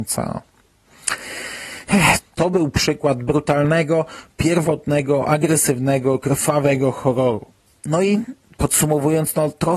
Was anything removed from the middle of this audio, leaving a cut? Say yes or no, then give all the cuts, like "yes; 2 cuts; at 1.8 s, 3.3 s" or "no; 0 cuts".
yes; 1 cut; at 2.2 s